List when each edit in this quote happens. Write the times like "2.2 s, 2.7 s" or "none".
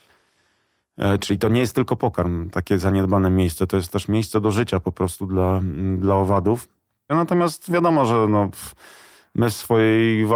7.1 s

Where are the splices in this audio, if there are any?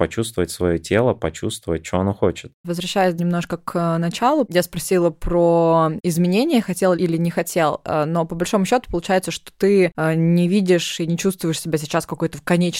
4.4 s

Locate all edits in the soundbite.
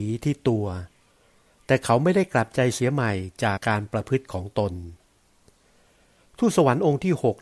3.6 s

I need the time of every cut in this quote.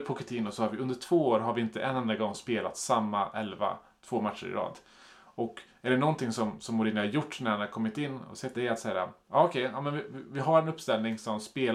8.5 s

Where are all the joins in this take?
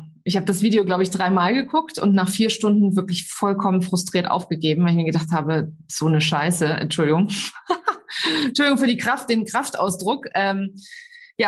none

